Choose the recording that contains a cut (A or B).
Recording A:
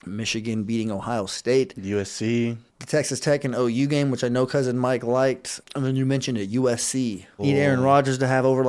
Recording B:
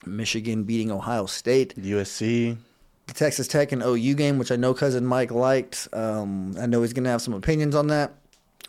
A